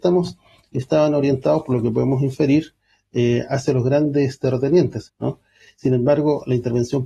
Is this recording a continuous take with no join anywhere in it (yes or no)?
no